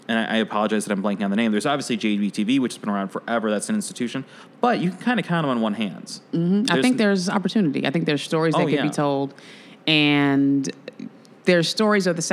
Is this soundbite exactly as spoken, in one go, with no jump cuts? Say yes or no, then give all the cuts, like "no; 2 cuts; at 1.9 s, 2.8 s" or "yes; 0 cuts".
yes; 0 cuts